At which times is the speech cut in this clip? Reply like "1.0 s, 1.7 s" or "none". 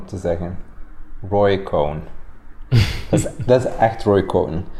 none